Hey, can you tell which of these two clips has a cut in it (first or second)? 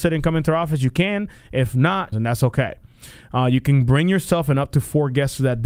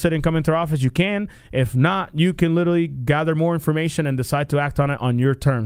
first